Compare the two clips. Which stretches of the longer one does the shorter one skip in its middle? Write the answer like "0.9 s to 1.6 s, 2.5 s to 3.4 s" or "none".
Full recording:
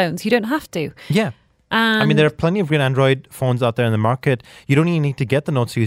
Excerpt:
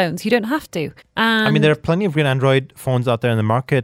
1.0 s to 1.5 s